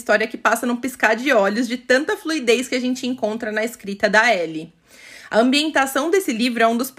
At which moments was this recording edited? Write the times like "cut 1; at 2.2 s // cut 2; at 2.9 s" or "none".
none